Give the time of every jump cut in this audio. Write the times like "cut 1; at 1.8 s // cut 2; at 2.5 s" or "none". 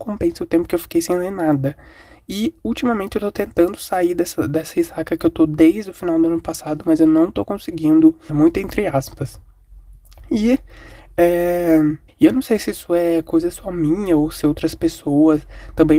cut 1; at 8.3 s // cut 2; at 12.1 s

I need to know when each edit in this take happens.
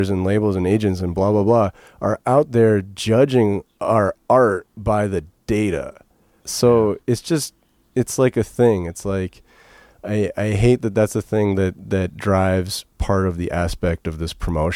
cut 1; at 6.4 s

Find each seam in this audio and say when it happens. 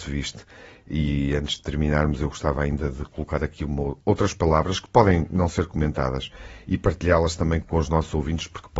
cut 1; at 7.6 s

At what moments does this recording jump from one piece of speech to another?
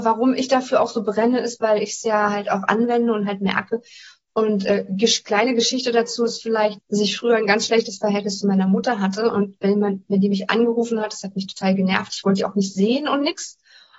cut 1; at 6.8 s

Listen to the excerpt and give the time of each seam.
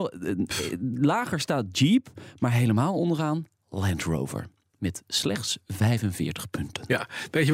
none

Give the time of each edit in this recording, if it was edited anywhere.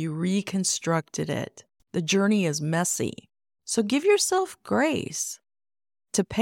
cut 1; at 1.8 s

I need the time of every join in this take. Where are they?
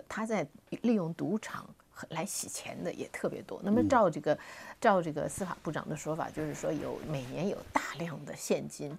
none

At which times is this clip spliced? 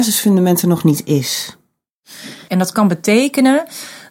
cut 1; at 2.5 s

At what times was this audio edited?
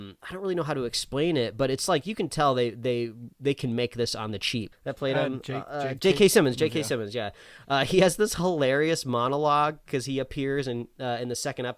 cut 1; at 4.7 s

